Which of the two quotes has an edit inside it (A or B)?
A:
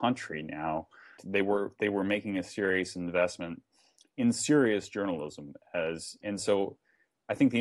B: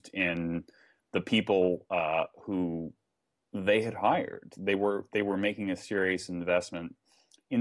A